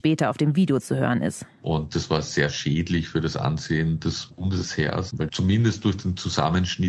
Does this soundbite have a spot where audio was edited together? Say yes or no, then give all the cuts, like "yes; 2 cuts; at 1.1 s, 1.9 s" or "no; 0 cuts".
no; 0 cuts